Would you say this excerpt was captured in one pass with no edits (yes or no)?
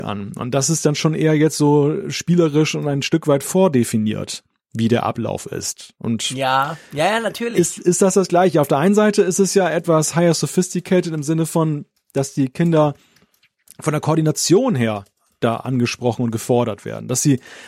yes